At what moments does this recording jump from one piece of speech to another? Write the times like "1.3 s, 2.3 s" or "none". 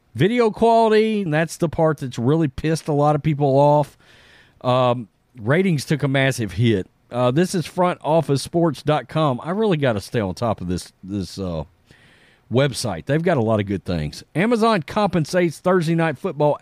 1.3 s